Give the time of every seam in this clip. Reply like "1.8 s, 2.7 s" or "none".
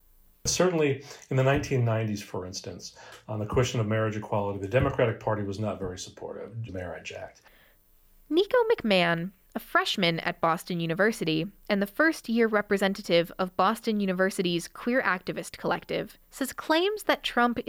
6.7 s, 16.2 s